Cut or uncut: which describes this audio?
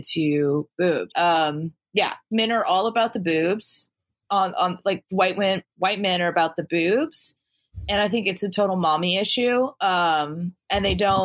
cut